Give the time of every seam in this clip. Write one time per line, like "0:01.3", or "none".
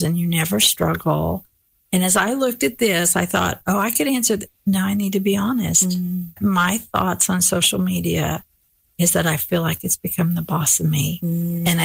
none